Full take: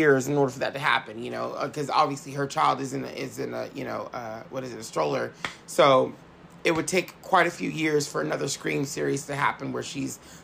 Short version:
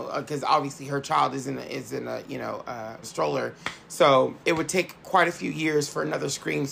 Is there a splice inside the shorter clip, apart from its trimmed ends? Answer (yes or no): yes